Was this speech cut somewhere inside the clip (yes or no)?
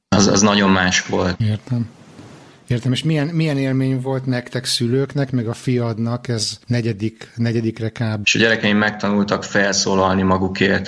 yes